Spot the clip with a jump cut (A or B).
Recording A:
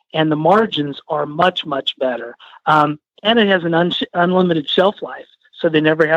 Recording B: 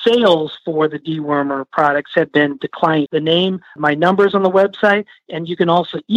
B